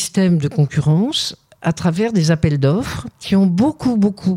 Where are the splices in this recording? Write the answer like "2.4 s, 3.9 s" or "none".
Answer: 3.1 s

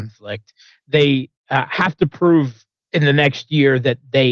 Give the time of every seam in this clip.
none

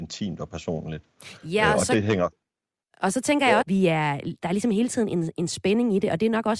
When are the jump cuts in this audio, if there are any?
3.6 s

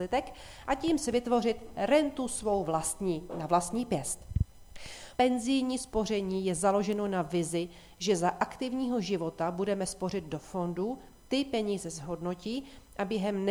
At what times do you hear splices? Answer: 5.2 s

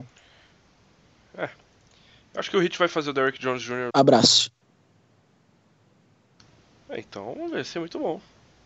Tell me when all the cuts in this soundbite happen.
3.9 s

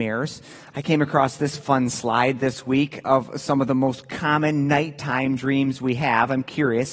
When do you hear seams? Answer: none

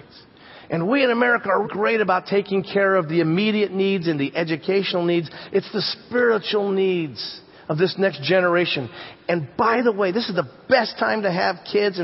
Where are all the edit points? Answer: 1.6 s

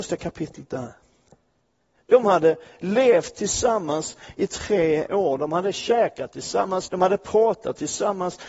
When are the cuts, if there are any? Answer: 2.0 s, 5.4 s, 6.9 s

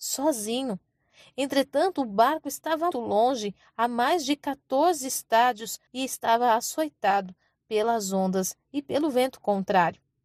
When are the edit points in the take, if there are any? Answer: 2.9 s, 5.9 s

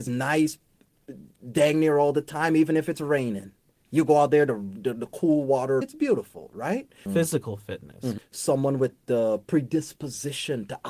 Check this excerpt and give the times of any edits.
5.8 s, 7.1 s, 8.2 s

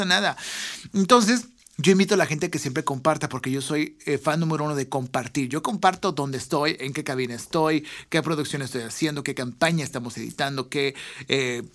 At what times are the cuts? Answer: none

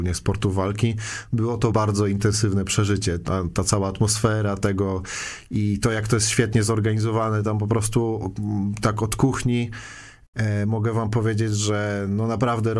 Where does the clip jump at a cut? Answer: 1.7 s

